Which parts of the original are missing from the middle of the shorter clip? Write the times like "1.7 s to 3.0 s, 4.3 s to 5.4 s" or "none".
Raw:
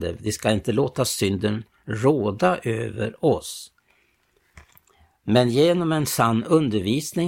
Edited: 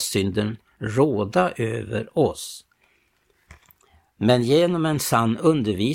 none